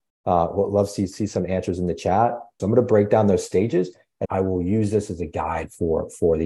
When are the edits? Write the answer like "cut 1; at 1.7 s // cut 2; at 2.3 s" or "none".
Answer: cut 1; at 2.6 s // cut 2; at 4.2 s

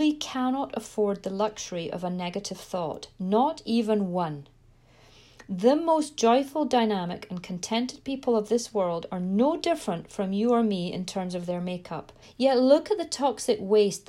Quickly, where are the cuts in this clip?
cut 1; at 12.2 s

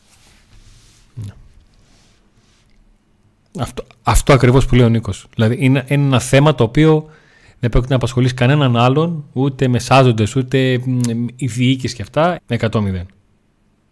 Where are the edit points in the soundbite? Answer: cut 1; at 10.3 s // cut 2; at 12.4 s

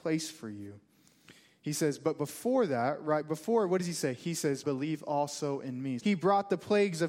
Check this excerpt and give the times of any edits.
cut 1; at 4.6 s // cut 2; at 6.0 s

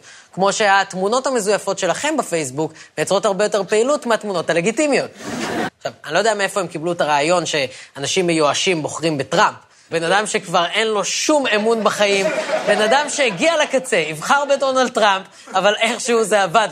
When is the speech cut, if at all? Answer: cut 1; at 5.7 s // cut 2; at 9.9 s

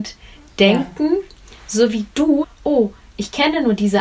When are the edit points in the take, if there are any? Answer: cut 1; at 2.4 s

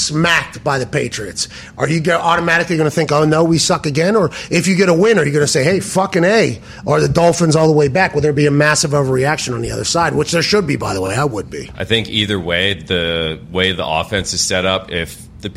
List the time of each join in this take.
none

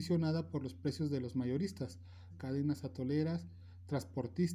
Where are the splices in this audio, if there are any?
cut 1; at 2.3 s

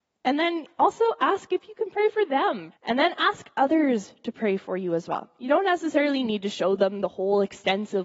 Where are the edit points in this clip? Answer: cut 1; at 2.7 s

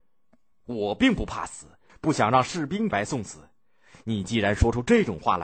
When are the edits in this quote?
cut 1; at 1.9 s // cut 2; at 2.9 s

